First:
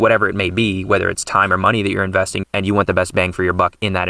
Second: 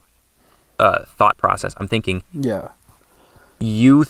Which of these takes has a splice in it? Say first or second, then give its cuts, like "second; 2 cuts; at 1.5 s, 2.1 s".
first; 1 cut; at 2.4 s